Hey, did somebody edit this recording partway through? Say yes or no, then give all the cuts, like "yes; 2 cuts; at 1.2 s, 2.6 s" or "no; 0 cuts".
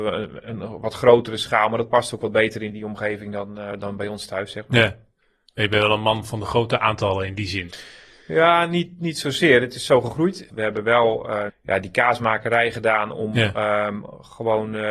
yes; 2 cuts; at 10.5 s, 11.5 s